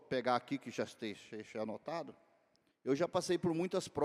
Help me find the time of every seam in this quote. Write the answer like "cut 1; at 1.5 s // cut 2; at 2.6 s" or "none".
cut 1; at 2.7 s

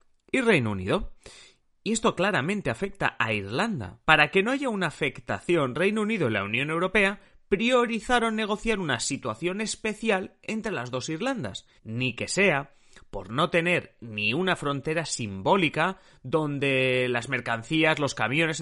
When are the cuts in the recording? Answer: cut 1; at 4.0 s // cut 2; at 11.8 s

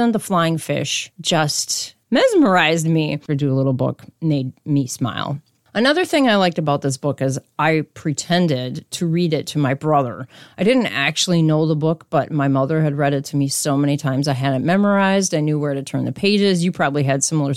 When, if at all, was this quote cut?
cut 1; at 3.3 s

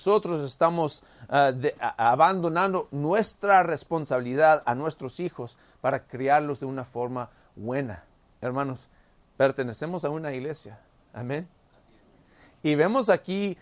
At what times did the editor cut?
cut 1; at 8.3 s

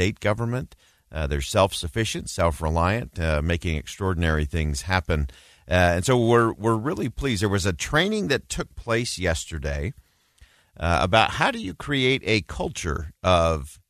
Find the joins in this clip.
none

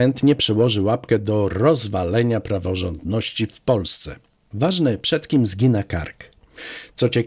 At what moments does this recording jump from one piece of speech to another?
cut 1; at 4.5 s

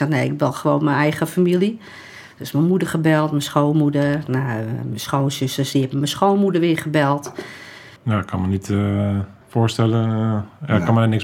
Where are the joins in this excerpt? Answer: cut 1; at 8.0 s // cut 2; at 9.4 s

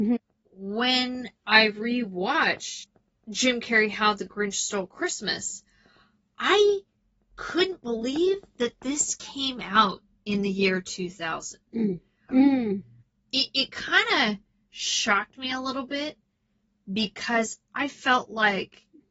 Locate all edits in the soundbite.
cut 1; at 12.3 s

